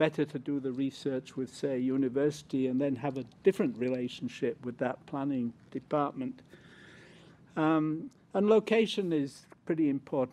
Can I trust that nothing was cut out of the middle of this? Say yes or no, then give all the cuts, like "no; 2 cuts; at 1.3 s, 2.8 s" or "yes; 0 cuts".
no; 1 cut; at 3.4 s